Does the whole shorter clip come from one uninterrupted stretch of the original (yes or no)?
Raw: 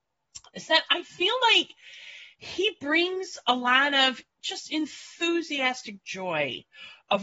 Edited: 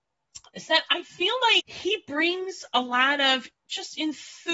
no